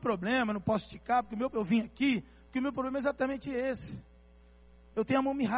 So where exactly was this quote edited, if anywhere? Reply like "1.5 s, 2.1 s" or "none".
none